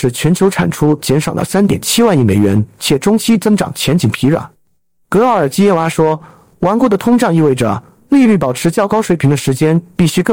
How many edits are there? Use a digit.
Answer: 1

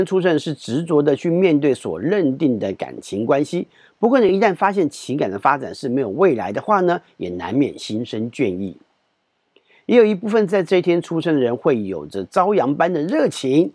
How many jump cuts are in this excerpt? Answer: 0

